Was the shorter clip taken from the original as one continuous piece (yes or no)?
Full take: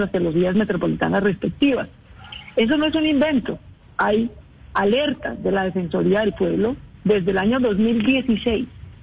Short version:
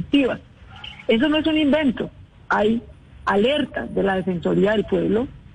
yes